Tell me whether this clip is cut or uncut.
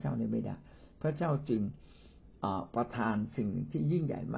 uncut